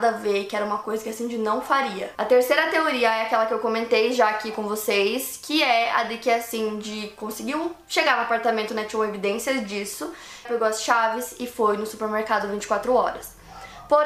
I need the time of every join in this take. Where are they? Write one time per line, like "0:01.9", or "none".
0:08.7
0:10.4